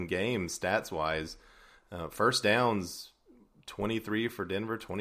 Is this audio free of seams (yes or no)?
yes